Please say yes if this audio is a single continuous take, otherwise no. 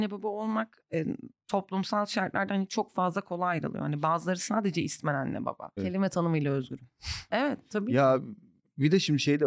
no